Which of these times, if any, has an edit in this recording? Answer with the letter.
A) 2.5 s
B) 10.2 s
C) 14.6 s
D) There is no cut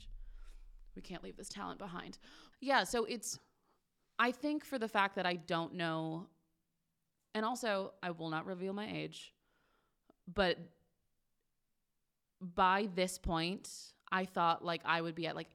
A